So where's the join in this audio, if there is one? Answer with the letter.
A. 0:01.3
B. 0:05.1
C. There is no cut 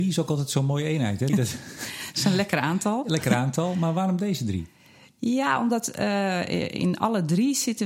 A